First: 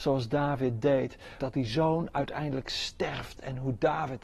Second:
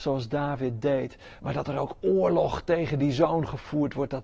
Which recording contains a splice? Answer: first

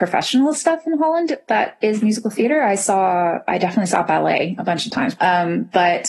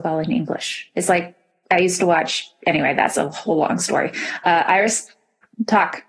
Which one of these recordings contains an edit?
first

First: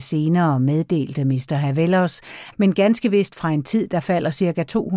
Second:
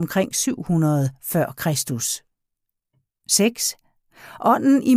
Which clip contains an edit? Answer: first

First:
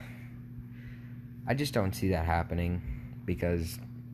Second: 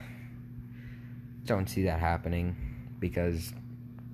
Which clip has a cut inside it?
second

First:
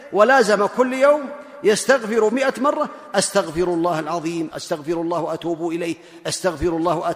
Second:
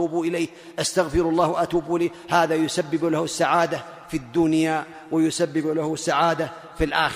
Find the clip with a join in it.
first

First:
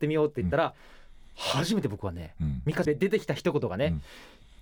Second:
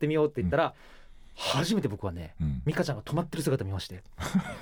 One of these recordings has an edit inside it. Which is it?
first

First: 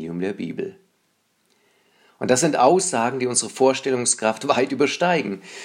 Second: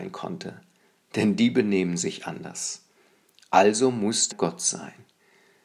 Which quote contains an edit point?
second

